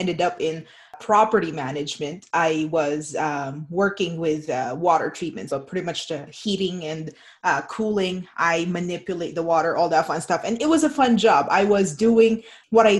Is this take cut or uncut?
cut